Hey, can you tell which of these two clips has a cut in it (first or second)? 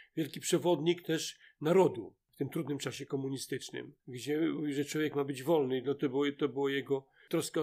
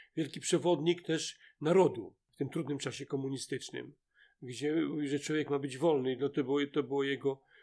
first